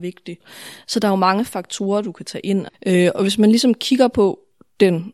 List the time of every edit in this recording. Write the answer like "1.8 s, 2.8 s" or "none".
2.7 s